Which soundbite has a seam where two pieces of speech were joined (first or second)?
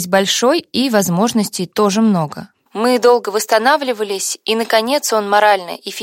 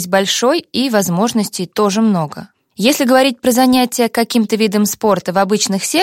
first